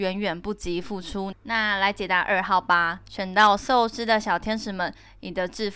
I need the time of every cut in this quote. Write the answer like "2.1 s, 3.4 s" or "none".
1.3 s